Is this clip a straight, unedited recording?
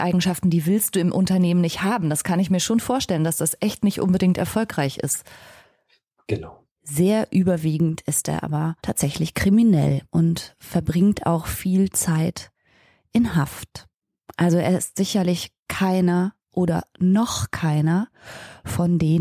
no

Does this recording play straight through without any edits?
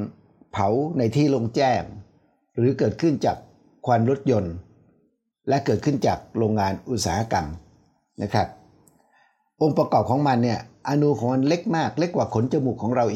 yes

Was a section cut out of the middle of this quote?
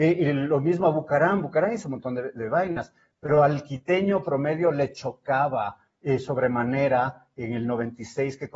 no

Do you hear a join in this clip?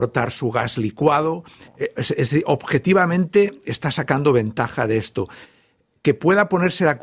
no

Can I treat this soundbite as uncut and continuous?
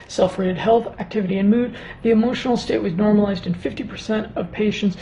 yes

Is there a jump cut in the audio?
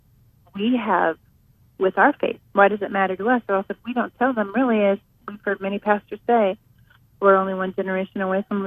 yes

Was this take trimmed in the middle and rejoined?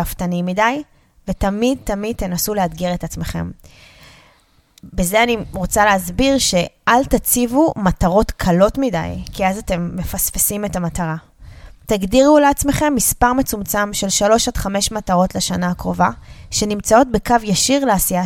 no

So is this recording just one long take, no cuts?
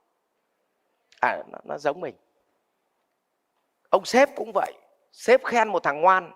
no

